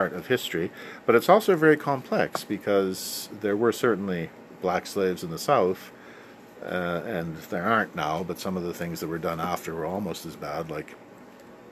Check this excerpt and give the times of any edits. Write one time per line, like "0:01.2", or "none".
none